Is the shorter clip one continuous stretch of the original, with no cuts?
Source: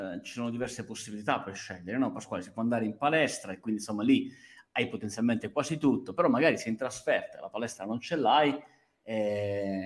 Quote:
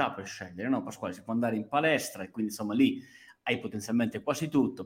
yes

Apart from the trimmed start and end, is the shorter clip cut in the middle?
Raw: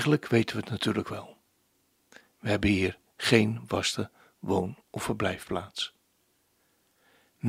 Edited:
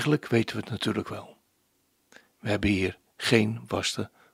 no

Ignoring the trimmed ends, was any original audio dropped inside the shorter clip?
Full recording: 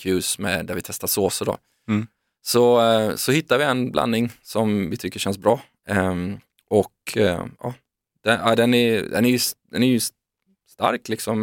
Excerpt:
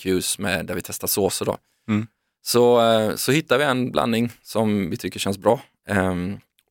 no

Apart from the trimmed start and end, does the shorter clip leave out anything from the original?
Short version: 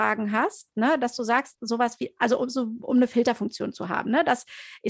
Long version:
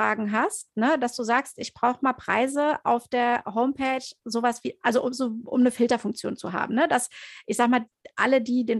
yes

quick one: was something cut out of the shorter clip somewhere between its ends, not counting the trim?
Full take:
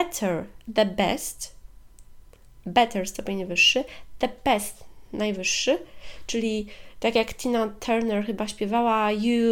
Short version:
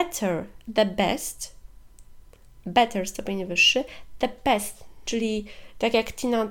yes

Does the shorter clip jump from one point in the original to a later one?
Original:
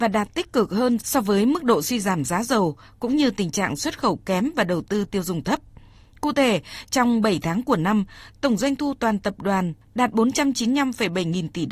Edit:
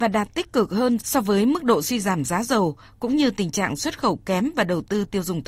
no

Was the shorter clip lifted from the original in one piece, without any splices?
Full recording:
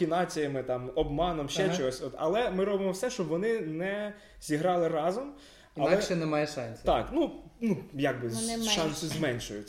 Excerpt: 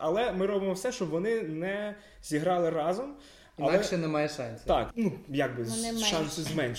no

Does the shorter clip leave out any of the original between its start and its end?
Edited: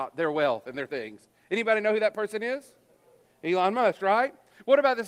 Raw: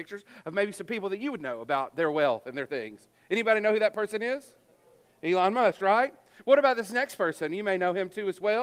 no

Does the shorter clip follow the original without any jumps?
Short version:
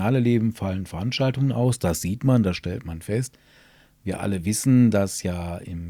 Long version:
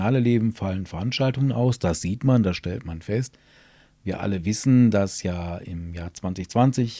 yes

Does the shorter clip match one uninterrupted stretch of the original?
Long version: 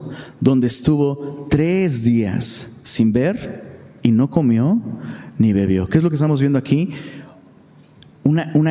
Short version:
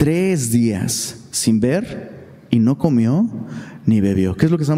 yes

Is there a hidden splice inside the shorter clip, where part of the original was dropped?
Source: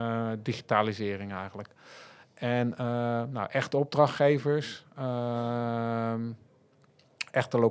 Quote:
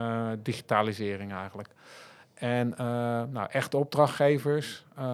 no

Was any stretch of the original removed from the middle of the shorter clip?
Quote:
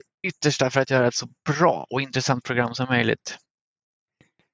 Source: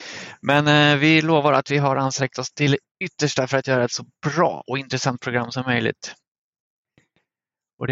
no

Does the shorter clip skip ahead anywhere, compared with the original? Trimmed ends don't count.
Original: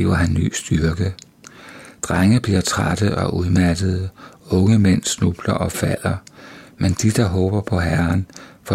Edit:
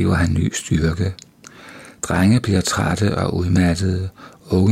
no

